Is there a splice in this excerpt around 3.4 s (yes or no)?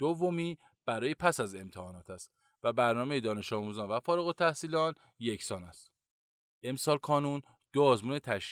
no